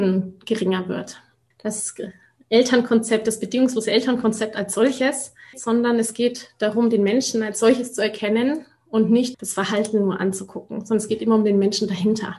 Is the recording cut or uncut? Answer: cut